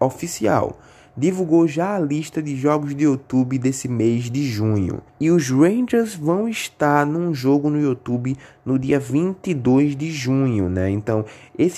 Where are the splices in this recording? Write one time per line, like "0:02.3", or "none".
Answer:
0:05.1